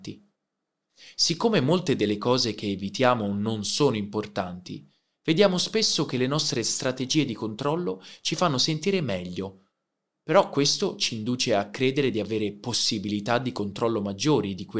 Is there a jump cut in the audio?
no; 0 cuts

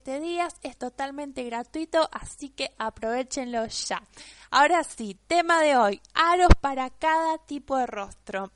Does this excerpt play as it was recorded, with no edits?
yes; 0 cuts

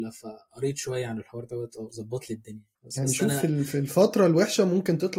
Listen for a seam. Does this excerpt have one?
yes; 1 cut; at 2.7 s

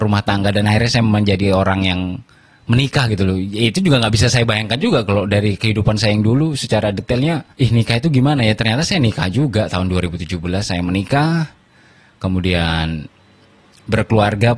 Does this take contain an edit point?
yes; 1 cut; at 7.5 s

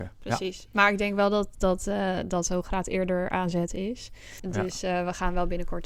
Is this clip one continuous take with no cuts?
no; 1 cut; at 4.4 s

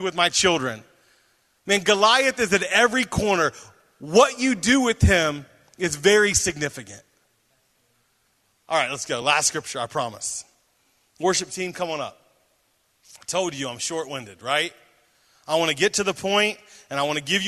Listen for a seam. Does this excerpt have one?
no; 0 cuts

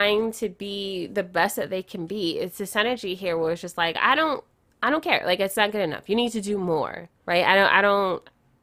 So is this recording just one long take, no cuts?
yes; 0 cuts

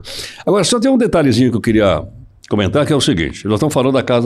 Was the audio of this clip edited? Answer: no; 0 cuts

